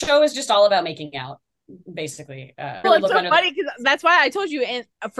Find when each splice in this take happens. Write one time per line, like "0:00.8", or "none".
0:02.8